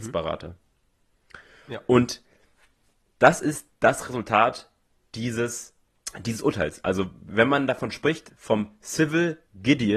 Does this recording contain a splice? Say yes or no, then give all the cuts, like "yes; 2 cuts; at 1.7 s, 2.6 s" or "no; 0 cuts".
yes; 1 cut; at 3.7 s